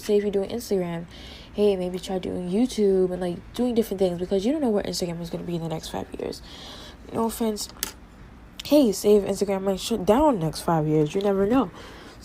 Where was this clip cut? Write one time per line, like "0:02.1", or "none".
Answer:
none